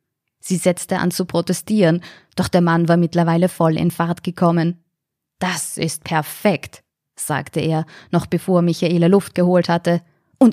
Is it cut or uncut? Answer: uncut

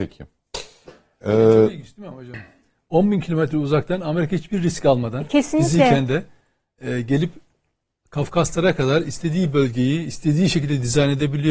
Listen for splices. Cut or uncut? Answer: uncut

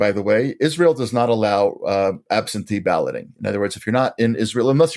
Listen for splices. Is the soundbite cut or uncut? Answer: uncut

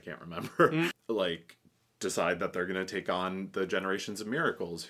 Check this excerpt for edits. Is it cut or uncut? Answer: cut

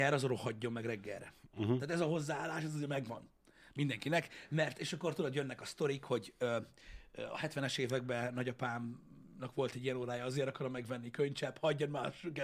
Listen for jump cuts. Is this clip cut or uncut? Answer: uncut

